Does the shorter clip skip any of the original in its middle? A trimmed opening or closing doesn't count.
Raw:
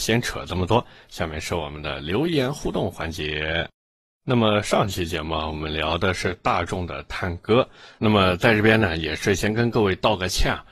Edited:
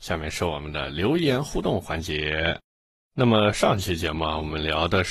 no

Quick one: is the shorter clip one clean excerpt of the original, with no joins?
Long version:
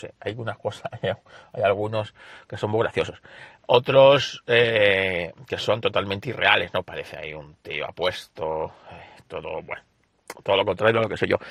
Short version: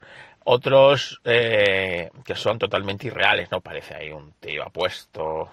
yes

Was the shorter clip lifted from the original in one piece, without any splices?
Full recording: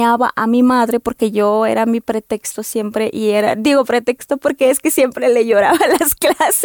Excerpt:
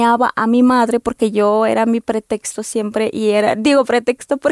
yes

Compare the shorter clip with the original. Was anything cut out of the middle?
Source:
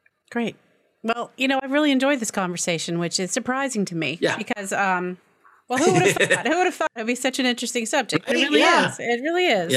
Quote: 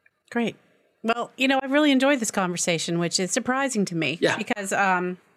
no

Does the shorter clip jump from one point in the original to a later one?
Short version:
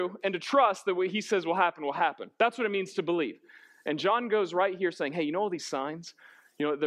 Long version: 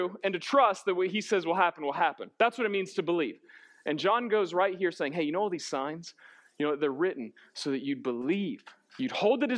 no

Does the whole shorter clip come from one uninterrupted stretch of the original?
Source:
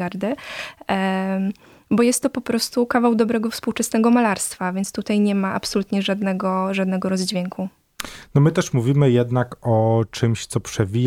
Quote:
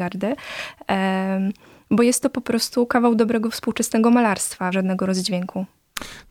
no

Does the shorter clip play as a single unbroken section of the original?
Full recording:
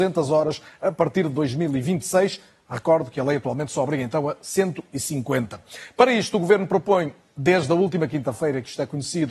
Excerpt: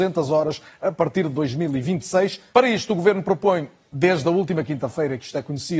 no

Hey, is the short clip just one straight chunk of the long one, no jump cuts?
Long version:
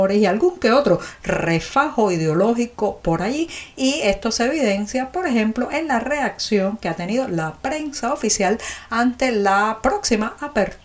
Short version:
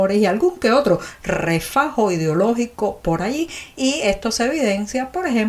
yes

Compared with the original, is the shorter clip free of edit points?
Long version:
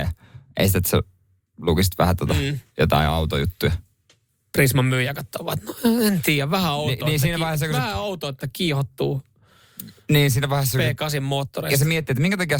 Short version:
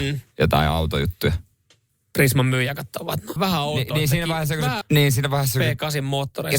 no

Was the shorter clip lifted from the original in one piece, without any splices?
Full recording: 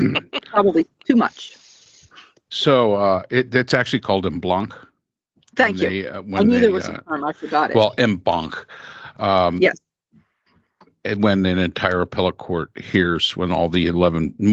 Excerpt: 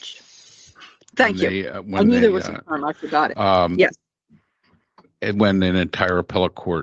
no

